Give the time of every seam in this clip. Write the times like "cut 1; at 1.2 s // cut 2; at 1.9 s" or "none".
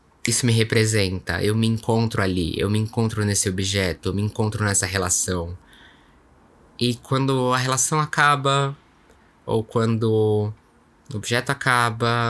none